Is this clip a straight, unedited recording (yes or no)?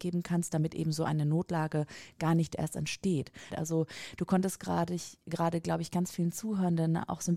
no